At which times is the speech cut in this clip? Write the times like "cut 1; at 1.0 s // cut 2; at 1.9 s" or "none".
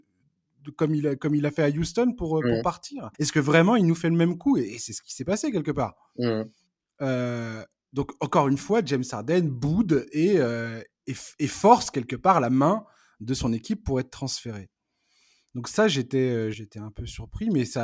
cut 1; at 3.1 s // cut 2; at 16.5 s